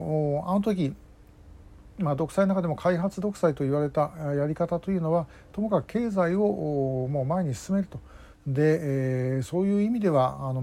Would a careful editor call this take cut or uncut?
cut